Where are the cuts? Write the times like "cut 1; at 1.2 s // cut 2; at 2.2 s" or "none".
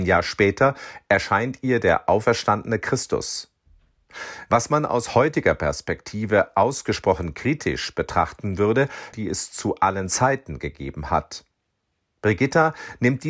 cut 1; at 9.1 s